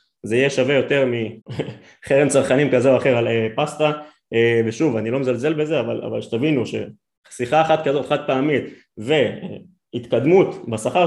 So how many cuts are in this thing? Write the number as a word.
one